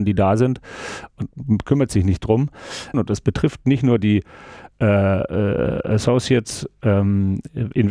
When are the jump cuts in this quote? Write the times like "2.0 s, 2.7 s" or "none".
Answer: 2.9 s